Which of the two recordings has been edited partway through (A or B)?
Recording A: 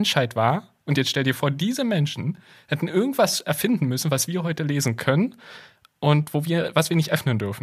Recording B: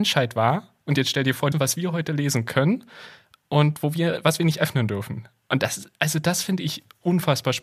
B